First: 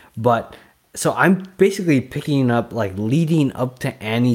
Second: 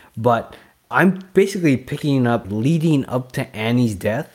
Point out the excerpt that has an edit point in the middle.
second; 2 cuts; at 0.9 s, 2.4 s

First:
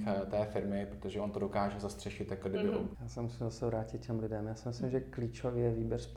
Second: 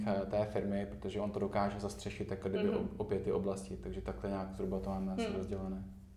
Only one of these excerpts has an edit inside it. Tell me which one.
first; 1 cut; at 2.9 s

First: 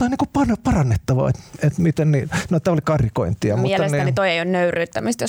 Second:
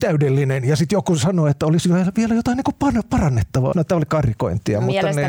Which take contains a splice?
second; 1 cut; at 3.7 s

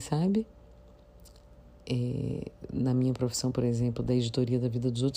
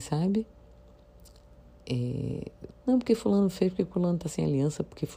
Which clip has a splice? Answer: second; 1 cut; at 2.7 s

